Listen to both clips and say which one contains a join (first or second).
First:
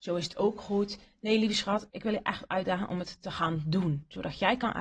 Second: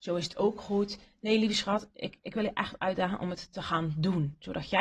first